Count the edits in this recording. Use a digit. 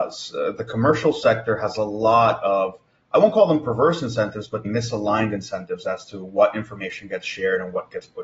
1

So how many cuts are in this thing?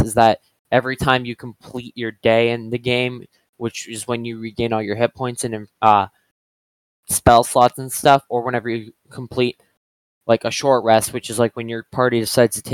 0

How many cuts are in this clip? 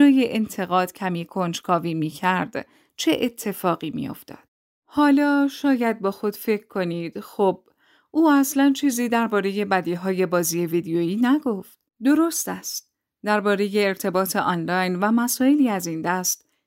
1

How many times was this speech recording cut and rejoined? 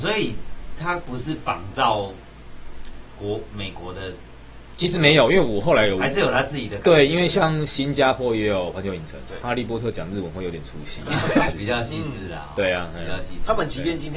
2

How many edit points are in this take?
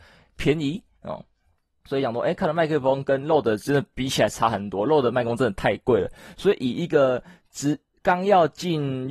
0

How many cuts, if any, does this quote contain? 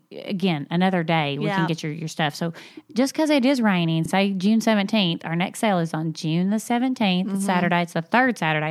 0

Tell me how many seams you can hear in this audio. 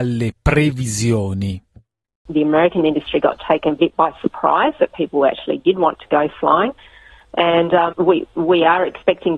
1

